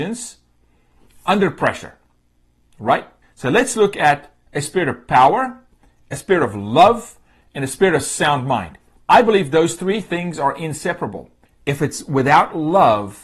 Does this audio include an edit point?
yes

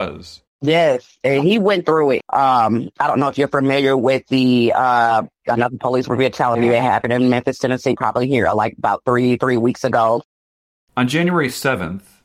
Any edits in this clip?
yes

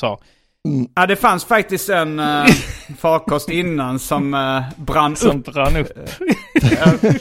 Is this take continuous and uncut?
yes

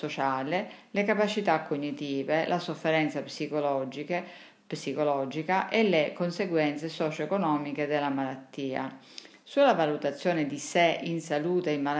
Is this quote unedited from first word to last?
no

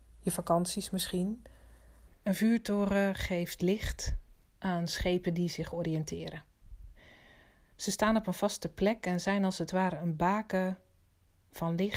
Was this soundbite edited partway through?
yes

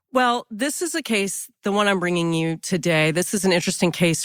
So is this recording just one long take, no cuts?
yes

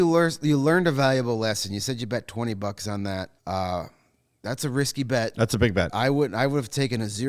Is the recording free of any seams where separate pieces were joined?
no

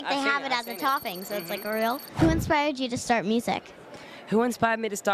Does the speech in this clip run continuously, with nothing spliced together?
yes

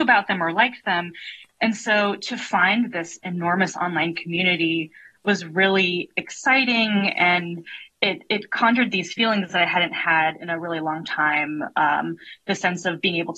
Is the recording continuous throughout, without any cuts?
yes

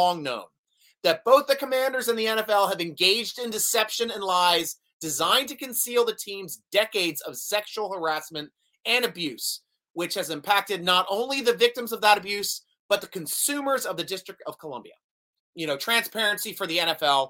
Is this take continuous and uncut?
no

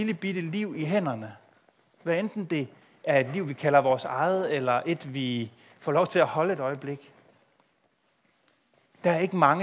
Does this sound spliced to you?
no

